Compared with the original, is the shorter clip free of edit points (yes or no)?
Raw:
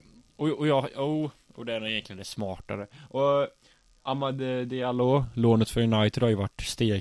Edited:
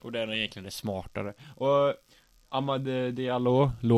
yes